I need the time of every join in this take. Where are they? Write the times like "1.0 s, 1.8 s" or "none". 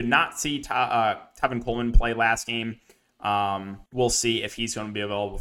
3.9 s